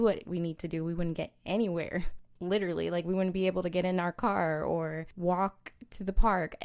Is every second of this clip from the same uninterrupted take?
yes; 0 cuts

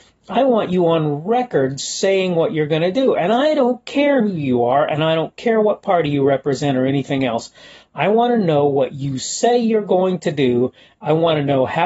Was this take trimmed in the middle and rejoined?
no; 0 cuts

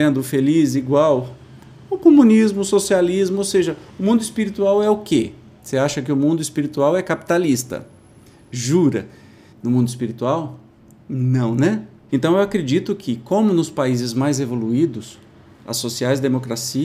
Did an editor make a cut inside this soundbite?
yes; 2 cuts; at 9.5 s, 12.1 s

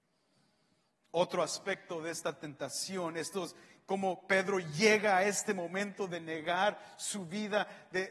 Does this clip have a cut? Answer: no; 0 cuts

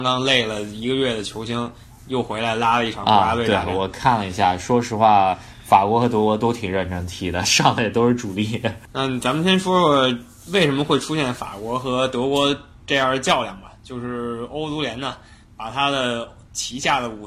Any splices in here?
no; 0 cuts

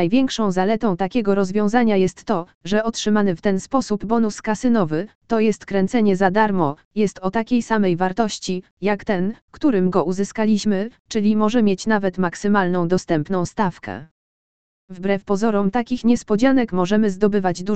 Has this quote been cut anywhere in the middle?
no; 0 cuts

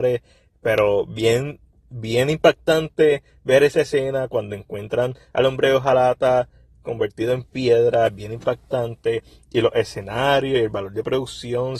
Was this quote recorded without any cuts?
yes; 0 cuts

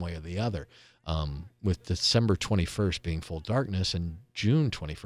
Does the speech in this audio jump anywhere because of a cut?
no; 0 cuts

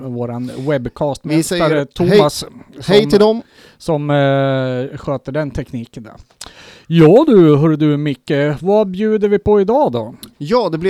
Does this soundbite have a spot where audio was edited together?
no; 0 cuts

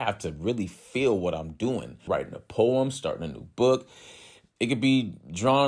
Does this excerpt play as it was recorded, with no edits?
no; 2 cuts; at 2.1 s, 4.6 s

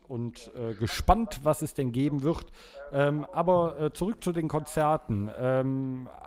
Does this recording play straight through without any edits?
yes; 0 cuts

